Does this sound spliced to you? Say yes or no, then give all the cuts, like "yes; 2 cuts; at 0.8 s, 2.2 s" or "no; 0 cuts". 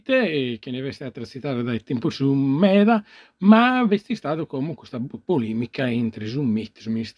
no; 0 cuts